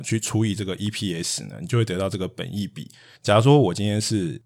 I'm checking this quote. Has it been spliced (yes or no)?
yes